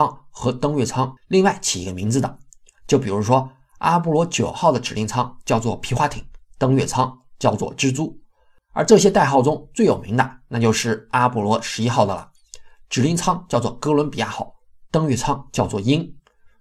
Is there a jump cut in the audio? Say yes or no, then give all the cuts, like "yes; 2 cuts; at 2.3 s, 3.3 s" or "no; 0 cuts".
no; 0 cuts